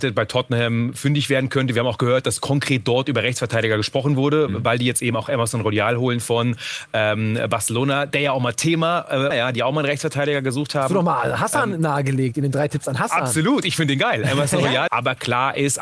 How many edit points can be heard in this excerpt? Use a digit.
2